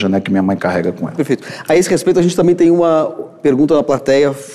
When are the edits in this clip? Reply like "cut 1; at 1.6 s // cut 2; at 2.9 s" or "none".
none